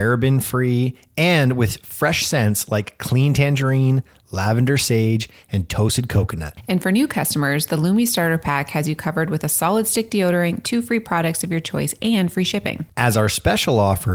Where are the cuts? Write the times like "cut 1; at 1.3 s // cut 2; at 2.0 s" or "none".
cut 1; at 10.6 s // cut 2; at 12.9 s